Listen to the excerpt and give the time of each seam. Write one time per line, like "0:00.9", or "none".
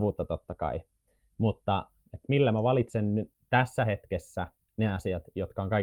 0:02.0